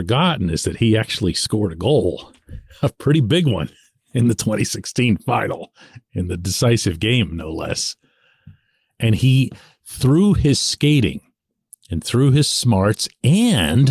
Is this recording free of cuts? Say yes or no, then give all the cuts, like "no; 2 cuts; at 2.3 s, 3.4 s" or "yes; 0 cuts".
yes; 0 cuts